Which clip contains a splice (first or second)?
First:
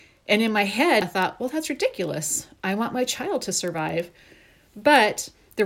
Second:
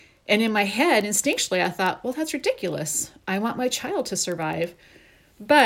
first